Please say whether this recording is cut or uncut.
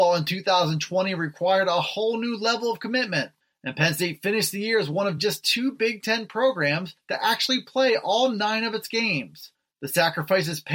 uncut